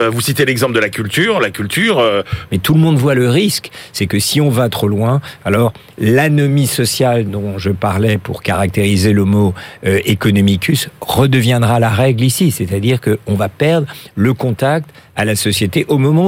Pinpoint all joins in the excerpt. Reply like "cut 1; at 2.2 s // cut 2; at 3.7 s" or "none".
cut 1; at 2.5 s